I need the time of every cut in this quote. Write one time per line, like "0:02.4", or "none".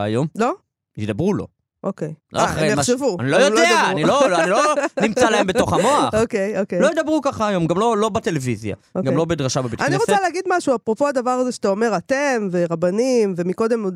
none